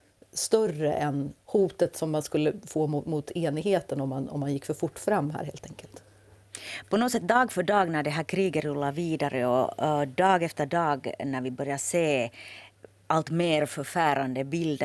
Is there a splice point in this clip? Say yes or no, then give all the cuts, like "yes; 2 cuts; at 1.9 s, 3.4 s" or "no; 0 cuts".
no; 0 cuts